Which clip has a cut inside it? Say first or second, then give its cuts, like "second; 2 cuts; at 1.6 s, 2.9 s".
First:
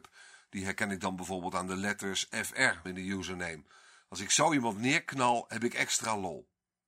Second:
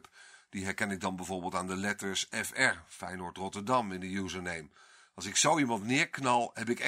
first; 1 cut; at 2.8 s